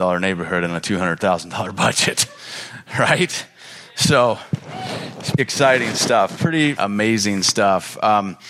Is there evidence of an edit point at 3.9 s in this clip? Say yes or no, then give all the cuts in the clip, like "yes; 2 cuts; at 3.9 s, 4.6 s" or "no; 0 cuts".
no; 2 cuts; at 5.4 s, 6.7 s